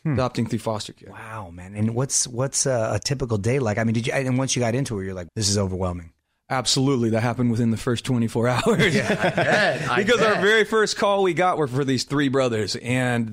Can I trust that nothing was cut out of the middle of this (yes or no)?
no